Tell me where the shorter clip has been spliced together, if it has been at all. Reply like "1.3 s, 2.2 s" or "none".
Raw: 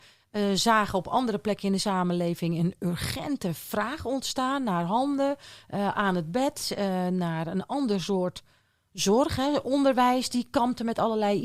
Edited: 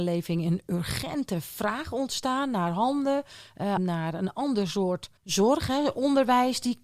3.8 s, 5.2 s